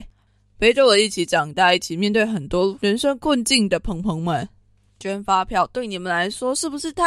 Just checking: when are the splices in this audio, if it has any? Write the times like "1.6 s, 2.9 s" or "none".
none